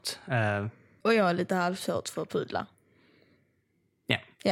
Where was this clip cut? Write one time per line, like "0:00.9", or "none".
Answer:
0:01.0